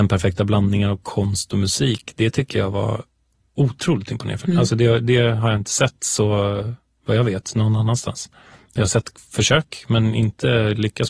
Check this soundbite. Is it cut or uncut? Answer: uncut